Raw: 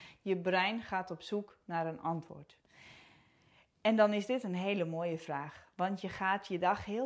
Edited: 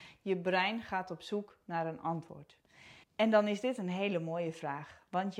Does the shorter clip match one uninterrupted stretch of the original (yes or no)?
no